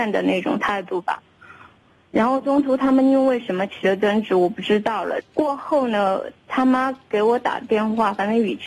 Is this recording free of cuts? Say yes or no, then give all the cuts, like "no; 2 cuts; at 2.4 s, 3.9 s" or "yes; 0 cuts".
no; 1 cut; at 5.2 s